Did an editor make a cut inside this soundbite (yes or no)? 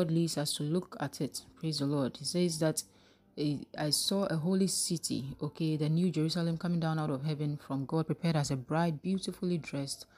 no